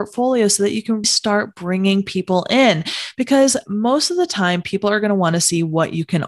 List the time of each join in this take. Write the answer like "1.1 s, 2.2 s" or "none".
1.0 s